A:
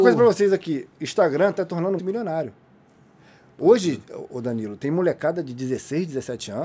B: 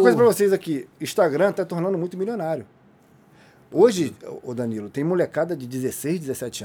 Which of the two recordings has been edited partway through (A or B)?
A